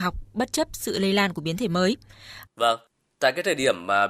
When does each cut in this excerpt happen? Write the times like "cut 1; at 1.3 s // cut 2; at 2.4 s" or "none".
cut 1; at 2.5 s